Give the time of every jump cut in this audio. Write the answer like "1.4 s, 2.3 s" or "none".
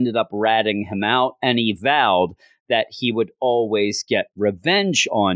none